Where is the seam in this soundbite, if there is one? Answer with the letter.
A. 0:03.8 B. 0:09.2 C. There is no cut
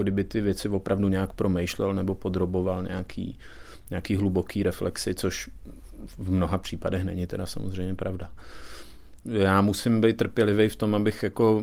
B